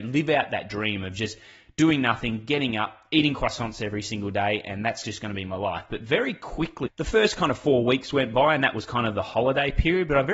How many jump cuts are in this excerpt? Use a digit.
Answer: 1